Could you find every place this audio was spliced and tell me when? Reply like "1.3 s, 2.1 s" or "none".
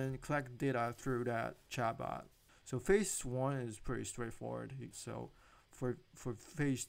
2.5 s, 4.9 s